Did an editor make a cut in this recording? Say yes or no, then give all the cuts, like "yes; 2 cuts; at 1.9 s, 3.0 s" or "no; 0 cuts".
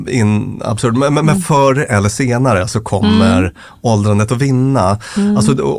no; 0 cuts